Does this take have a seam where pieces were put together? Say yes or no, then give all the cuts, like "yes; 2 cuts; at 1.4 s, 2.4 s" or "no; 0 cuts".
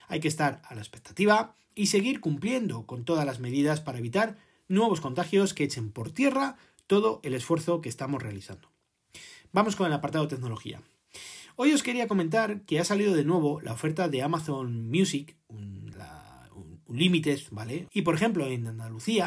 yes; 2 cuts; at 15.9 s, 17.9 s